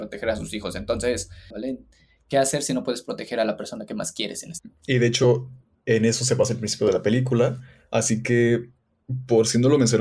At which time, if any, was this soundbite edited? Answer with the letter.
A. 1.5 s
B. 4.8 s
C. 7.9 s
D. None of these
A